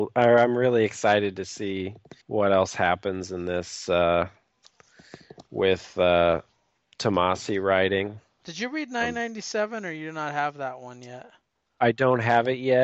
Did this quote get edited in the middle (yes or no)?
yes